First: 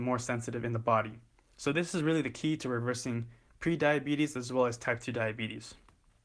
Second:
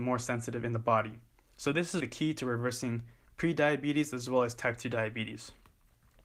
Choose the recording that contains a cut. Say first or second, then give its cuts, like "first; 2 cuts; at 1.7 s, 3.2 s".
second; 1 cut; at 2.0 s